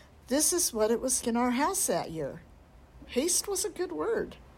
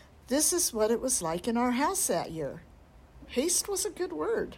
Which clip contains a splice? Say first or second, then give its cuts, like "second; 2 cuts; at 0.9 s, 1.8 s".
first; 1 cut; at 1.2 s